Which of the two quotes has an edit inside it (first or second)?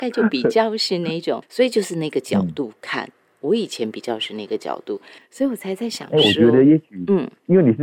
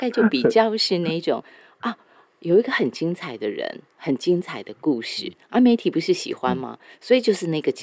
first